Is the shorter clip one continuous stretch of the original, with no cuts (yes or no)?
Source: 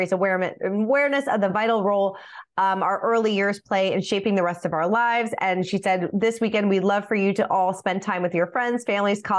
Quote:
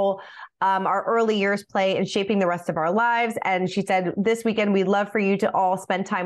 yes